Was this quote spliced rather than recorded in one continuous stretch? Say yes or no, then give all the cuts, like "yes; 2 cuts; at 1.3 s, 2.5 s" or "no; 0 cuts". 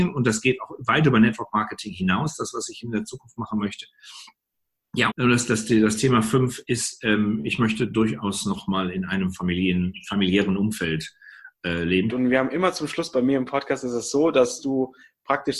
yes; 2 cuts; at 5.1 s, 12.1 s